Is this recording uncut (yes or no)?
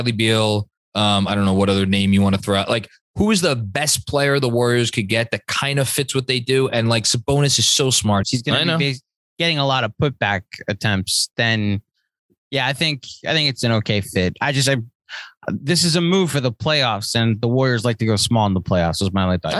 no